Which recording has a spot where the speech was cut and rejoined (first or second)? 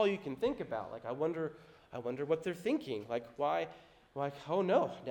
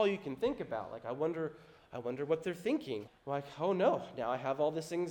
second